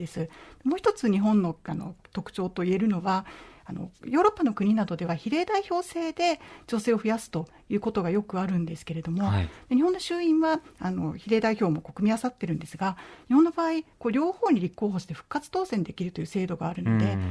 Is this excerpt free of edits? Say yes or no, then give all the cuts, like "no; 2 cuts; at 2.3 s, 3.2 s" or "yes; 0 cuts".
yes; 0 cuts